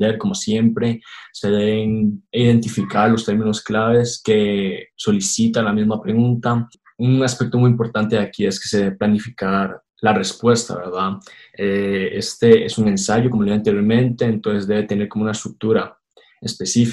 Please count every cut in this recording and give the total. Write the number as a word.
zero